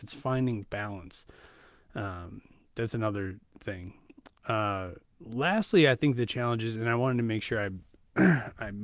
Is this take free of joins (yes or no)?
yes